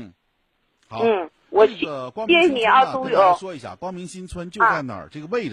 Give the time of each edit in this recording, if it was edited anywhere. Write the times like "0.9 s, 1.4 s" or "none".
none